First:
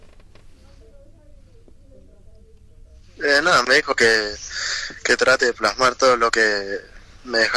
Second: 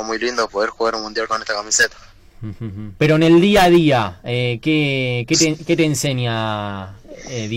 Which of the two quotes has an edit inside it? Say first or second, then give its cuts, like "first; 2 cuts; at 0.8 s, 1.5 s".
second; 1 cut; at 3.0 s